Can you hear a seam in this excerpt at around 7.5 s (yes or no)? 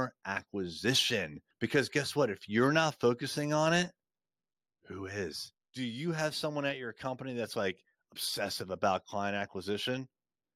no